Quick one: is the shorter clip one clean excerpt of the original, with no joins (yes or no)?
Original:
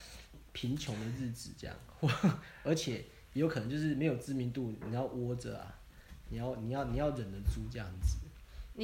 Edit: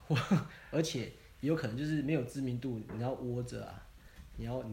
yes